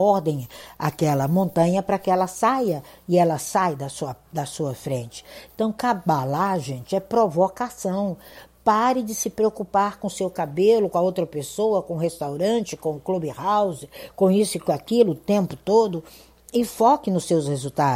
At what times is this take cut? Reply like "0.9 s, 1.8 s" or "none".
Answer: none